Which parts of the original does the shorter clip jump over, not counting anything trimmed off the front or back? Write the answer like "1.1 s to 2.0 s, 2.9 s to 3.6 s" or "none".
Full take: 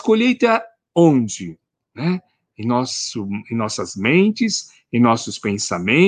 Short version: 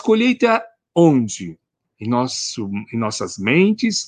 1.8 s to 2.4 s